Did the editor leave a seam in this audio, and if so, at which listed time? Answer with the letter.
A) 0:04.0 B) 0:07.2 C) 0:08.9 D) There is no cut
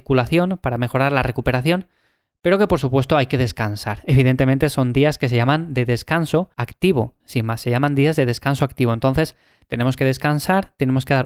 B